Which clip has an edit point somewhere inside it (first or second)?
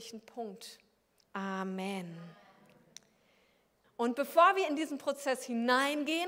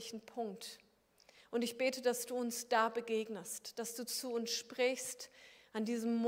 first